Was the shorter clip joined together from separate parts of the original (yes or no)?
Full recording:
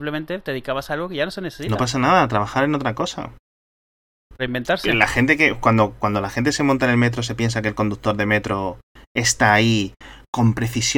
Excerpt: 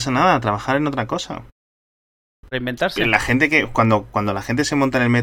no